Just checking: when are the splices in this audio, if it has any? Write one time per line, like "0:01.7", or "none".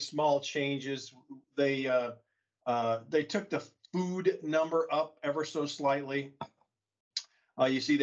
none